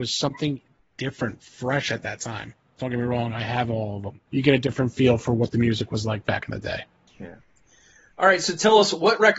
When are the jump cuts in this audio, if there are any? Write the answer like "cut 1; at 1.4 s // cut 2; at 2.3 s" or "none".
cut 1; at 2.8 s // cut 2; at 4.3 s